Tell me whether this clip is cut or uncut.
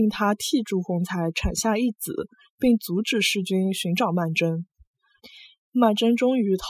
uncut